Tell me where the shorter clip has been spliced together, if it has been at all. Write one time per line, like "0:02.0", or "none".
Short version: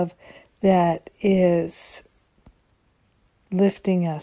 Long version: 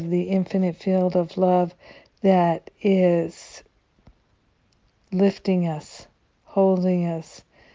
none